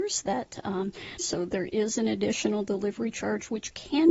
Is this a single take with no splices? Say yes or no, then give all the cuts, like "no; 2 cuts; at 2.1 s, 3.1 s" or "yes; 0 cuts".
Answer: no; 1 cut; at 1.2 s